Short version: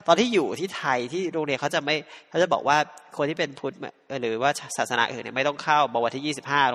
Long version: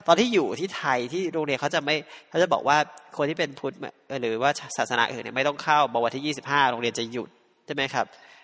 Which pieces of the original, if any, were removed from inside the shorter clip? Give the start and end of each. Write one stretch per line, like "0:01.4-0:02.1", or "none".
none